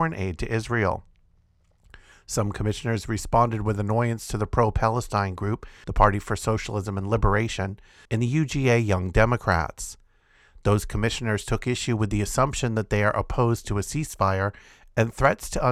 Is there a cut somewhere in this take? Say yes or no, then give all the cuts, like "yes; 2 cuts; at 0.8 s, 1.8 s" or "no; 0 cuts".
yes; 2 cuts; at 5.8 s, 8.0 s